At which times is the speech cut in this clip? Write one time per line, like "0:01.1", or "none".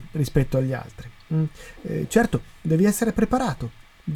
none